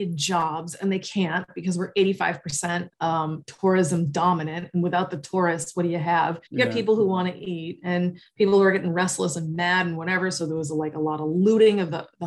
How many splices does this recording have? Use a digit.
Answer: 1